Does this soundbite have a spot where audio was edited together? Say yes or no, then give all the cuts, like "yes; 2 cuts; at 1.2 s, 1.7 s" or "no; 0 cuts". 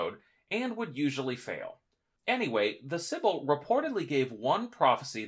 yes; 1 cut; at 2.2 s